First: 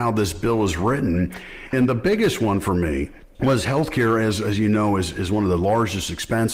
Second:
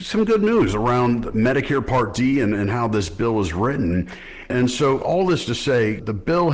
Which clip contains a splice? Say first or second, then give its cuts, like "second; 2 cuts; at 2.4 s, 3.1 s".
first; 1 cut; at 1.7 s